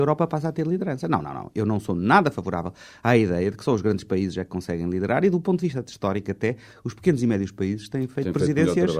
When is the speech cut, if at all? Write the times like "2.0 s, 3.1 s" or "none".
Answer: none